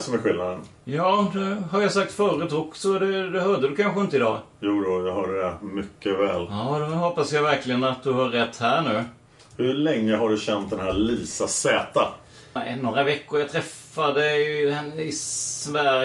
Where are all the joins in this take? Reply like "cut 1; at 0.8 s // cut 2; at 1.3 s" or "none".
cut 1; at 12.6 s